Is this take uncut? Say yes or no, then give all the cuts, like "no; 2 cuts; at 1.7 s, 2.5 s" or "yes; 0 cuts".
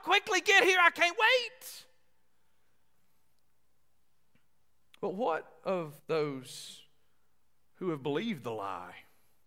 yes; 0 cuts